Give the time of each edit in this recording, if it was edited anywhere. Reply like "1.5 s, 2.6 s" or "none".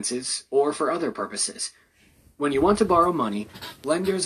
none